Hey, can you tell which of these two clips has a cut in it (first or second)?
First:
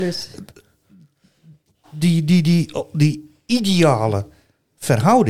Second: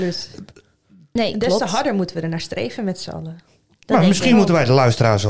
second